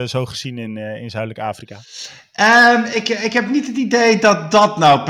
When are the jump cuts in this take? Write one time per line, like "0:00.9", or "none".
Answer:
none